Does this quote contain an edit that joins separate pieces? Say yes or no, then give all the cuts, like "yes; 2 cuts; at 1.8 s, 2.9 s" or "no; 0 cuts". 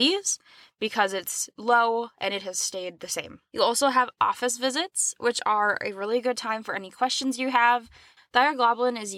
yes; 1 cut; at 8.2 s